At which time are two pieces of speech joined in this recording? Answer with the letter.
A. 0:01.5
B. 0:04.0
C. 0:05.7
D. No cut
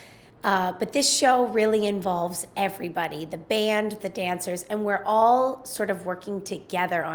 B